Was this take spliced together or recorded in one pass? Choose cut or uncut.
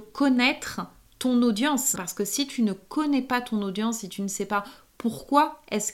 cut